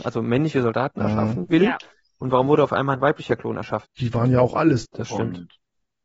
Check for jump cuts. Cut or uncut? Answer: cut